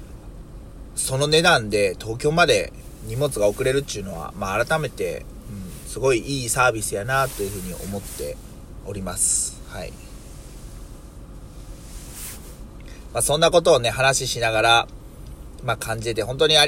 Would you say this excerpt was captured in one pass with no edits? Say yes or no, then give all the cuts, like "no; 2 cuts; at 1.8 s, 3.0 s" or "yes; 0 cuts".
yes; 0 cuts